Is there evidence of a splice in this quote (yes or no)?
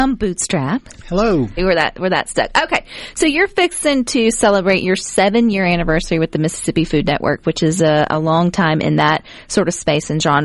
yes